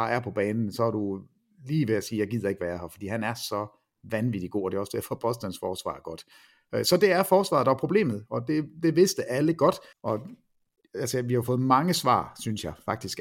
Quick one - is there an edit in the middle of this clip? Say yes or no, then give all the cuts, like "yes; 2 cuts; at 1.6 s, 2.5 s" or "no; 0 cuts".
yes; 1 cut; at 9.9 s